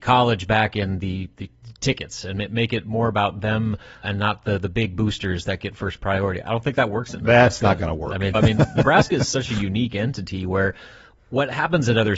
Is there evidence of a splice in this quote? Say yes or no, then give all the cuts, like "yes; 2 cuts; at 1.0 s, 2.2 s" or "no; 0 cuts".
yes; 2 cuts; at 4.0 s, 8.3 s